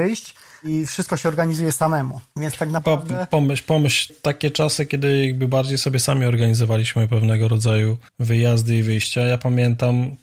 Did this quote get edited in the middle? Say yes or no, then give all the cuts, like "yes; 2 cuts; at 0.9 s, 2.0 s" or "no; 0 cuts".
yes; 2 cuts; at 4.1 s, 8.1 s